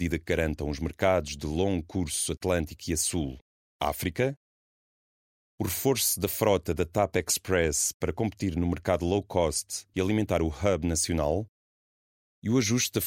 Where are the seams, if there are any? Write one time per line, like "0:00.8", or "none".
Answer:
none